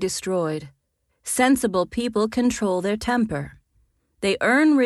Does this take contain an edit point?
yes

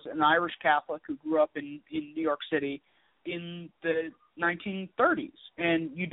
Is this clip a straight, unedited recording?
no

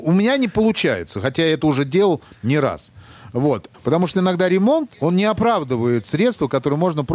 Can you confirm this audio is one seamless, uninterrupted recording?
no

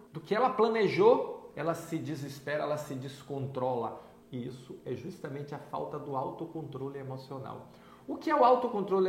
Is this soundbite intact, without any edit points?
no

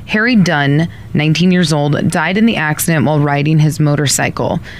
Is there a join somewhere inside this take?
no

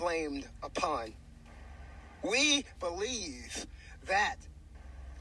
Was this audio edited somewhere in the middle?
yes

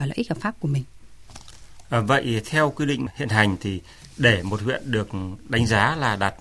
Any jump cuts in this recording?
no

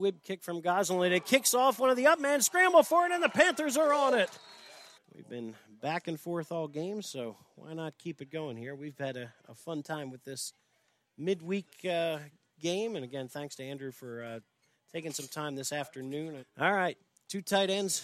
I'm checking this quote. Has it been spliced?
yes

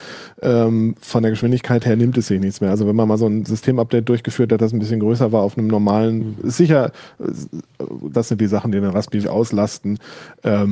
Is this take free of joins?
no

